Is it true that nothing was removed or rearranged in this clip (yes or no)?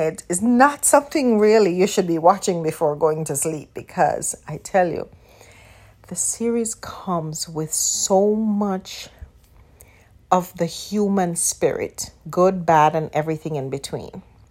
yes